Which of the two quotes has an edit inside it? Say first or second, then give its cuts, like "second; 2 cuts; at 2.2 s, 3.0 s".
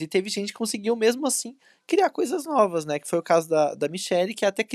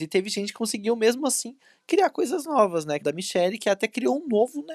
second; 1 cut; at 3.0 s